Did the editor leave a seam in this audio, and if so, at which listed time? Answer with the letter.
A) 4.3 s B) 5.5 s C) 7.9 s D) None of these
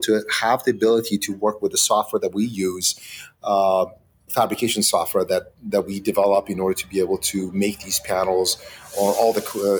A